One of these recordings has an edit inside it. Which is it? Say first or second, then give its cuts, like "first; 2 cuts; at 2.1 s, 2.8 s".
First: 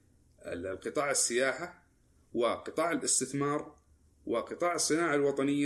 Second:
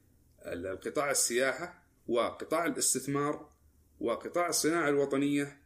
second; 1 cut; at 2.0 s